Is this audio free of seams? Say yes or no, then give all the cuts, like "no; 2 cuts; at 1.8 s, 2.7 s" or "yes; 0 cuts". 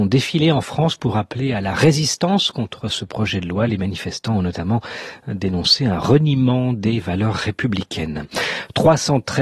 yes; 0 cuts